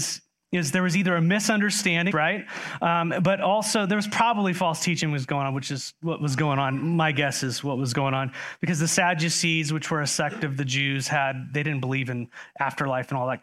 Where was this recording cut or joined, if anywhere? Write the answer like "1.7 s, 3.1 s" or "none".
2.1 s